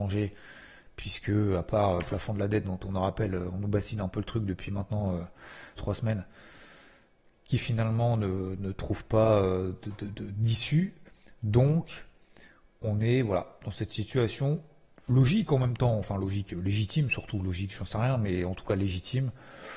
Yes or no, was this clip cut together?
yes